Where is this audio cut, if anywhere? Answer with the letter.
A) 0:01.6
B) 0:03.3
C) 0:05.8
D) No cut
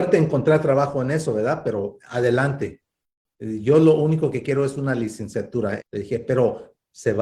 C